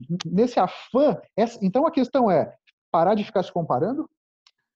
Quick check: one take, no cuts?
yes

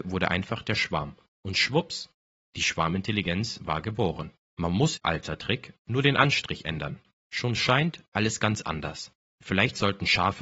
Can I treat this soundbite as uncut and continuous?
no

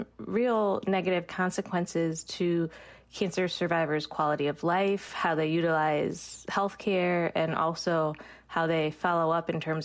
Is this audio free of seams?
yes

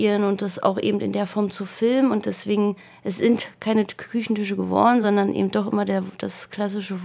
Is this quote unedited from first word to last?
yes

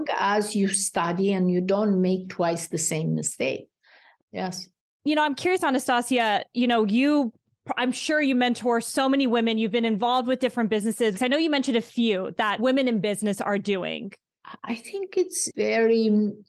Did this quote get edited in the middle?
yes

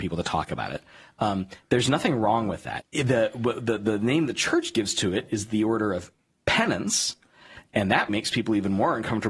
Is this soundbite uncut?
no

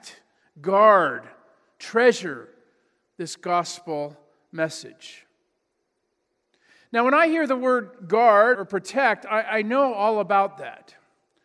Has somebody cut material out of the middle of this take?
yes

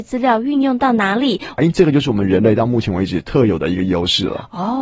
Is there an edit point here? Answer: yes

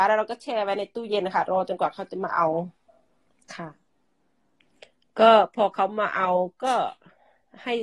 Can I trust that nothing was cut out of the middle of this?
yes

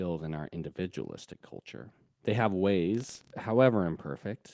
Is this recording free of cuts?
yes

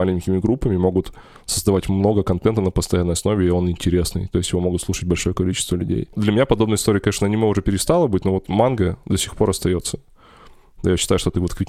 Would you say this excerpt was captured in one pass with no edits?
yes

